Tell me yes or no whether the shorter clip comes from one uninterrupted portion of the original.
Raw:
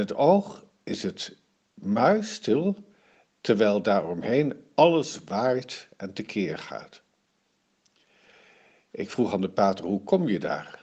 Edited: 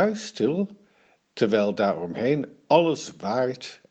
yes